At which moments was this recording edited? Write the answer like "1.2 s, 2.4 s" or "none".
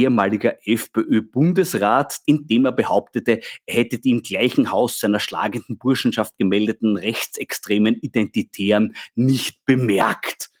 2.2 s